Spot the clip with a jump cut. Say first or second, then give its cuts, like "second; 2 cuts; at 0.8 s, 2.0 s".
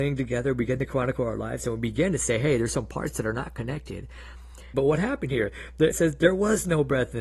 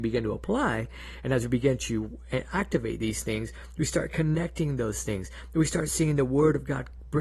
first; 2 cuts; at 4.7 s, 5.9 s